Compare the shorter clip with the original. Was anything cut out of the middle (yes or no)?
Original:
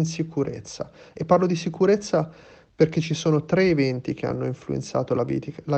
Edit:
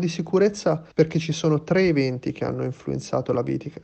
yes